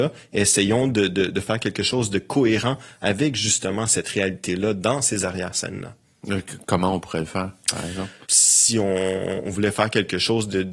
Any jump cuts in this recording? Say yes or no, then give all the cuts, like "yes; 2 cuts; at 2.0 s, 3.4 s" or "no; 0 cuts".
yes; 1 cut; at 8.3 s